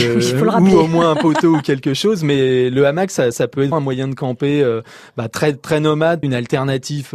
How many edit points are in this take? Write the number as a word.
two